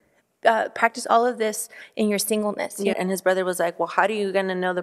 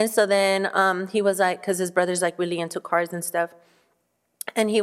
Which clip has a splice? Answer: first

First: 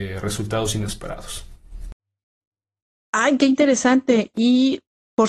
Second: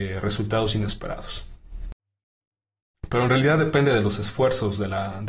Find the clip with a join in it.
second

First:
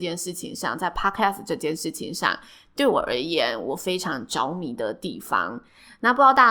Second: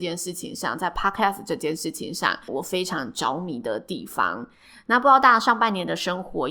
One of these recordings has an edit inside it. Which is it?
second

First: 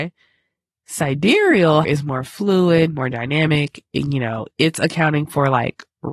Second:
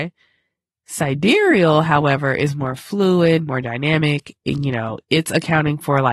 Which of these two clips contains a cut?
first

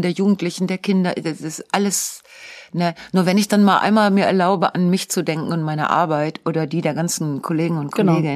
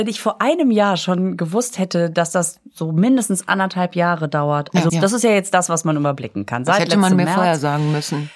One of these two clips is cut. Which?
second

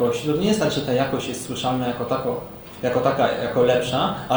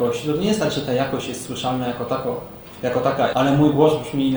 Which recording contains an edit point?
second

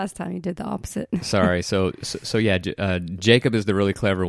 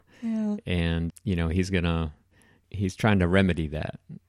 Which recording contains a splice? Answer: second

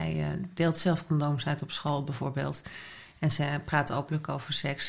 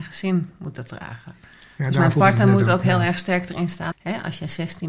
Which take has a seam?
second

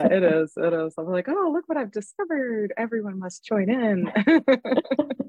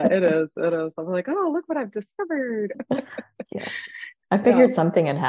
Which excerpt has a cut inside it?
second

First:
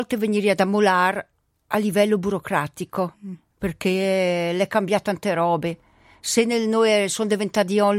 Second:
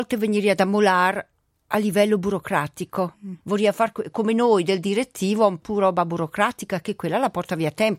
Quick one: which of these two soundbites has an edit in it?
second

